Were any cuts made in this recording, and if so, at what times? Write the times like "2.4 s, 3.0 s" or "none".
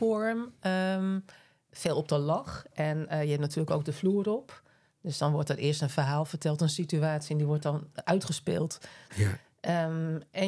9.1 s